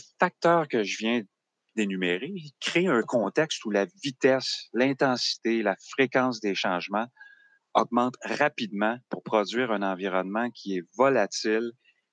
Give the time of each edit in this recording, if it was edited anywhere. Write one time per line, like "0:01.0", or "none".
none